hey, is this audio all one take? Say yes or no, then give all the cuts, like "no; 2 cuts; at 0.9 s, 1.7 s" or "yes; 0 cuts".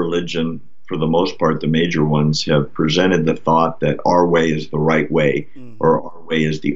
yes; 0 cuts